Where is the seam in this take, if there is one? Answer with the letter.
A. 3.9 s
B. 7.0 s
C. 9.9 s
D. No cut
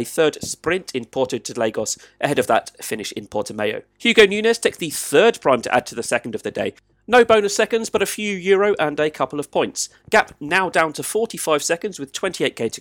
A